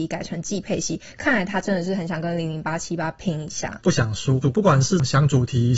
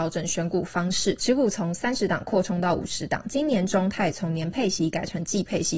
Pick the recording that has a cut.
first; 1 cut; at 4.4 s

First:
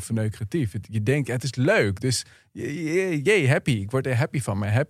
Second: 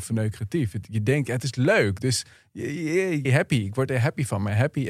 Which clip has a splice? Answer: second; 1 cut; at 3.2 s

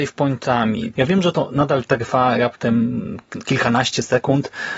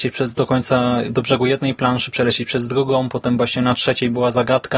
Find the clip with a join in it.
first; 1 cut; at 0.9 s

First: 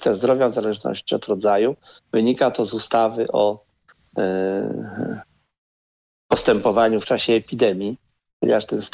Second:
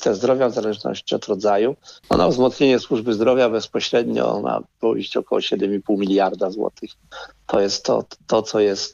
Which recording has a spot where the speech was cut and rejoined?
second; 1 cut; at 2.0 s

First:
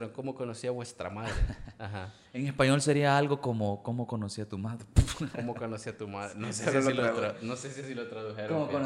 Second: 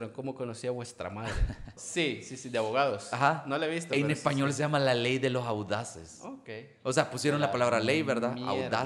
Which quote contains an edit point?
second; 1 cut; at 1.8 s

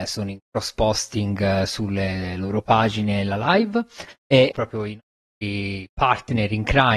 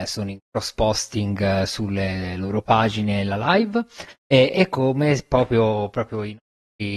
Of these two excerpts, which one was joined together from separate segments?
first; 1 cut; at 4.5 s

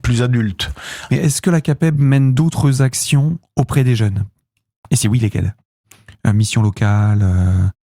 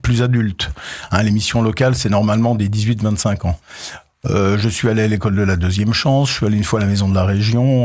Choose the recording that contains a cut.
first; 1 cut; at 1.1 s

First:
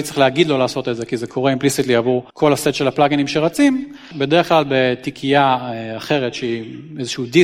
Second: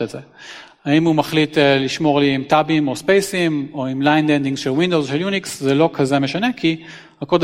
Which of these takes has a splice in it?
first; 2 cuts; at 2.3 s, 4.1 s

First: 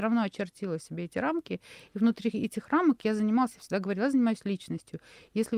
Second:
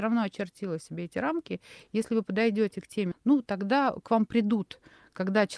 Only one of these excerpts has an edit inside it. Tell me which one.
second; 2 cuts; at 1.8 s, 3.1 s

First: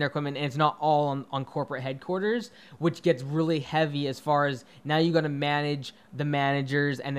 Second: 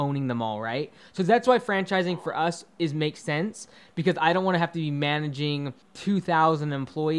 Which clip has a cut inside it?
second; 1 cut; at 5.8 s

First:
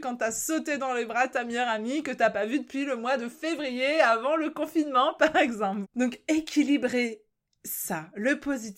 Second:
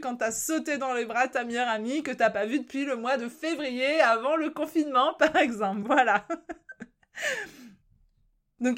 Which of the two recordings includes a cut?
first; 1 cut; at 5.8 s

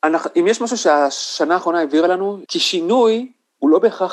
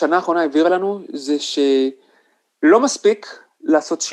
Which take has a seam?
first; 1 cut; at 2.5 s

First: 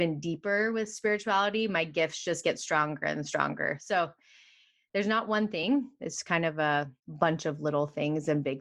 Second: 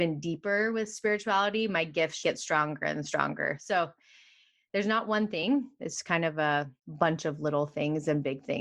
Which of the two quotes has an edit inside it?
second; 1 cut; at 2.2 s

